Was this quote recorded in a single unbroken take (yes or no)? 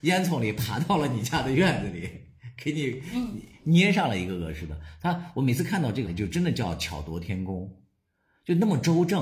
no